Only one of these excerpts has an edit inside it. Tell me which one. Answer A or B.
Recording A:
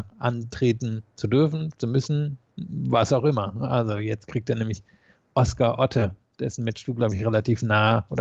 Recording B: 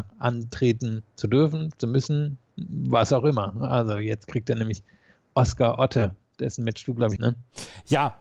B